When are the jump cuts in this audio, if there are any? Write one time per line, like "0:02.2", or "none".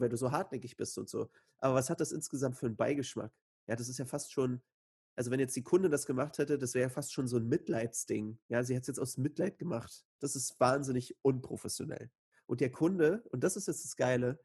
0:10.2